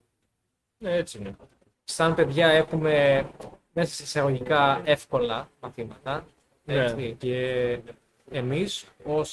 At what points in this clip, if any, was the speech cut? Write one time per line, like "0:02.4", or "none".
0:01.7
0:07.2